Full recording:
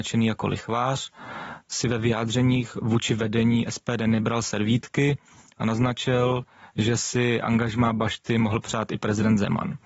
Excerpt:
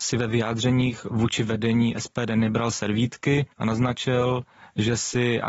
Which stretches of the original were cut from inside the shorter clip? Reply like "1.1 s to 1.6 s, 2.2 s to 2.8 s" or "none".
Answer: 5.2 s to 5.5 s